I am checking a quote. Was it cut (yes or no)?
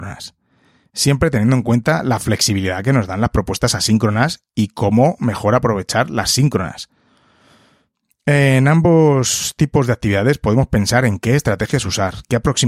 no